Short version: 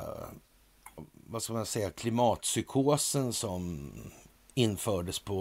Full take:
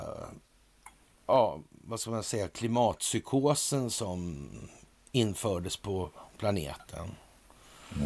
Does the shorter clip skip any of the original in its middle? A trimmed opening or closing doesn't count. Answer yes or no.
yes